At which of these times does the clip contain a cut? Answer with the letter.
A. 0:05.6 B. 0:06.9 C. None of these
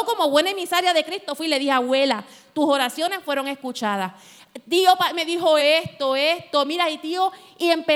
A